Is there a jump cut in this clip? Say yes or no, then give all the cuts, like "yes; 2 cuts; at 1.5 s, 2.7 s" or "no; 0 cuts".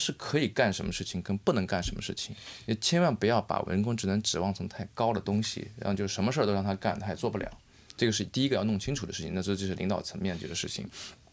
no; 0 cuts